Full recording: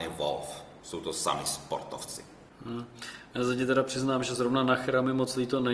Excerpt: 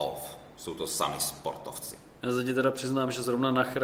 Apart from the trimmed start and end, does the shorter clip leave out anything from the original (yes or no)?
yes